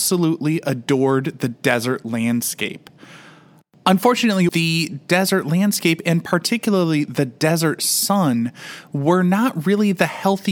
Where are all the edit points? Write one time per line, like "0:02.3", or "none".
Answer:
0:04.5

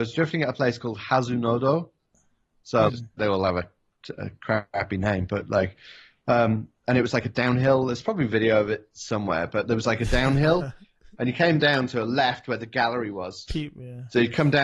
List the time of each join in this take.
0:02.9
0:13.5

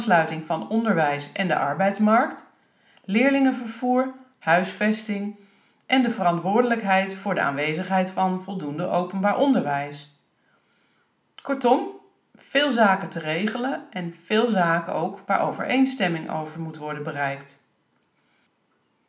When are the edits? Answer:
none

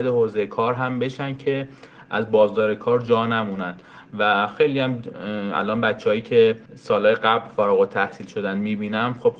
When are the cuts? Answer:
0:06.7

